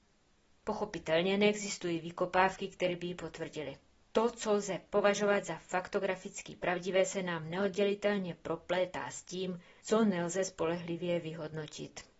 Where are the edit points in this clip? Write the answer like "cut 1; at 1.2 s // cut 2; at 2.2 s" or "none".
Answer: cut 1; at 4.0 s

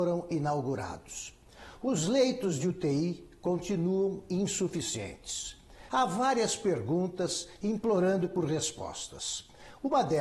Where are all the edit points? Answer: cut 1; at 5.9 s

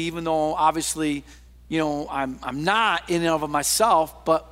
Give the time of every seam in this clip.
none

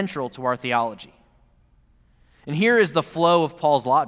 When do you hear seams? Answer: none

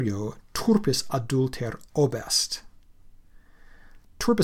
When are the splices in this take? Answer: cut 1; at 1.9 s

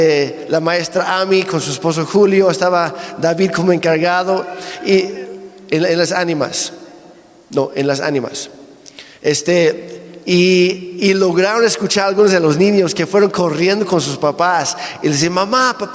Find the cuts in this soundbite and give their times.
none

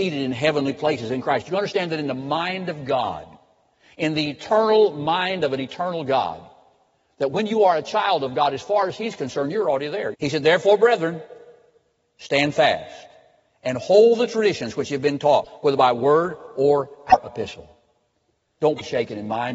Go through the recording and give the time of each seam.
cut 1; at 10.1 s // cut 2; at 18.6 s

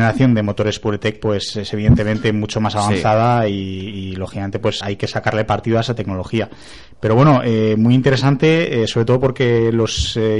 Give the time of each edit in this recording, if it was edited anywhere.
cut 1; at 4.8 s

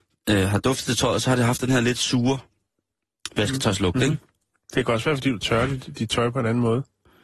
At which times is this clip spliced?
none

